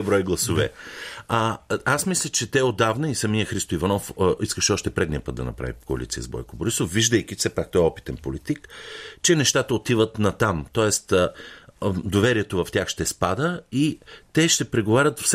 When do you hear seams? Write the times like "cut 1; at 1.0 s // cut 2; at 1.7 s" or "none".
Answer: none